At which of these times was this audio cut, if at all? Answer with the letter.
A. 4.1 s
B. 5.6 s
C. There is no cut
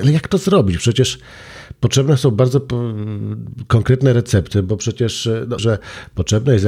B